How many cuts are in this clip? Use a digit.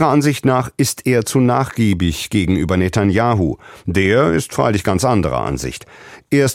0